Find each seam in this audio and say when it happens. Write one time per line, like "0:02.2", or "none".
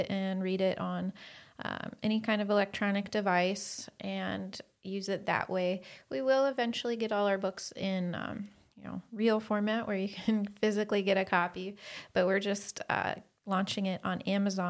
none